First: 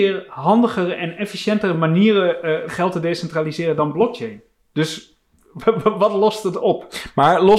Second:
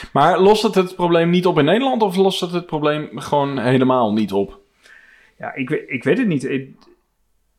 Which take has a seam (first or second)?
first